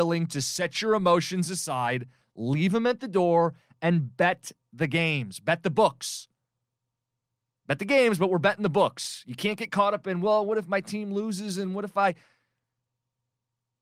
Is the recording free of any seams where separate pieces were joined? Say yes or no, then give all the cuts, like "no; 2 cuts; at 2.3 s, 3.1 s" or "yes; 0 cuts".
yes; 0 cuts